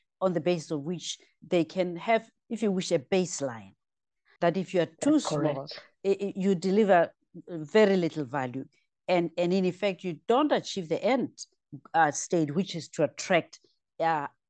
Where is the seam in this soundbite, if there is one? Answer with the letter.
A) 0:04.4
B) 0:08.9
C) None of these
A